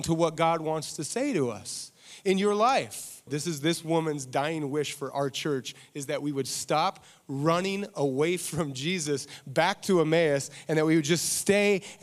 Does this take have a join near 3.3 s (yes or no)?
yes